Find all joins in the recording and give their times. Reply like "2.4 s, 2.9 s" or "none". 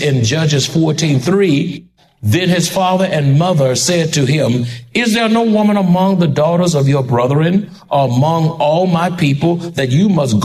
none